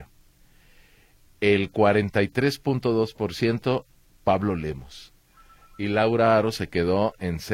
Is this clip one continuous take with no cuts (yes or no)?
yes